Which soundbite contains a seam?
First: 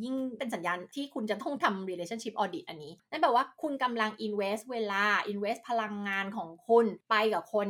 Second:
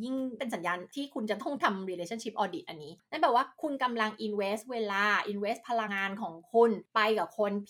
second; 1 cut; at 5.9 s

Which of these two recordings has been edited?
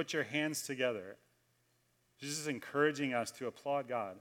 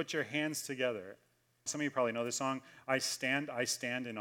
second; 1 cut; at 1.7 s

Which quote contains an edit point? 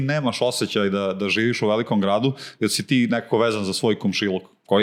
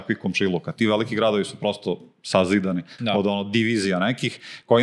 second; 1 cut; at 3.0 s

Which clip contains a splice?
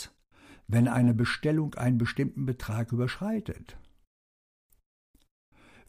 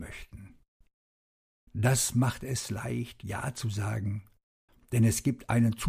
second; 1 cut; at 1.7 s

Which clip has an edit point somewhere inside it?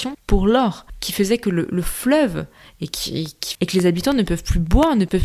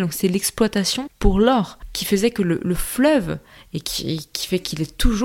first; 1 cut; at 3.6 s

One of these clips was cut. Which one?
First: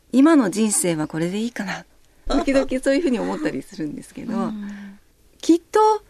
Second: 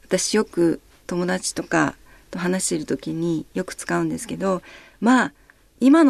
first; 1 cut; at 2.3 s

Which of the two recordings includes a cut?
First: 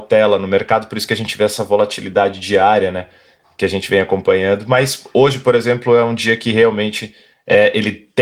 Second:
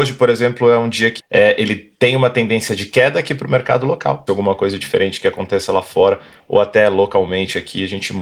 second; 2 cuts; at 1.2 s, 4.3 s

